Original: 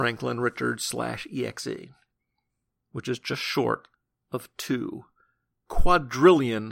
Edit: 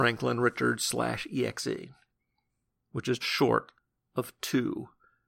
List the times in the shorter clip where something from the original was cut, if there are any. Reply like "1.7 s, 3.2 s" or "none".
3.2 s